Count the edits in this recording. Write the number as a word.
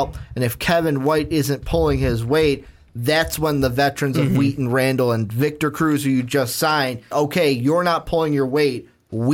one